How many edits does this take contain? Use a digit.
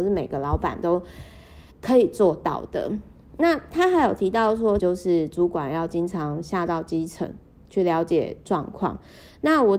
2